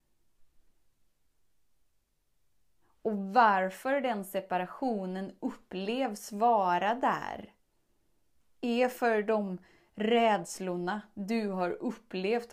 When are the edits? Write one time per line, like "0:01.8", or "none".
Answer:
none

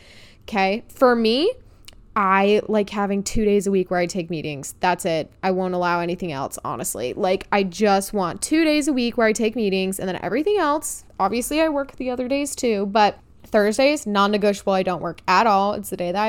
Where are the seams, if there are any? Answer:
none

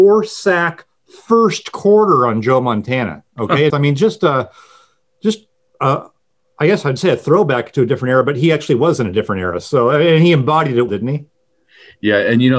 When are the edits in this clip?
0:03.7
0:10.9

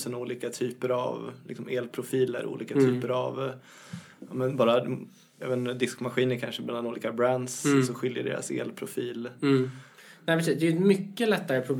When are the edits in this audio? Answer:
none

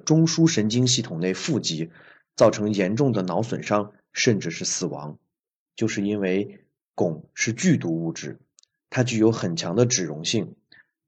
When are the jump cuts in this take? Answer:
0:05.7

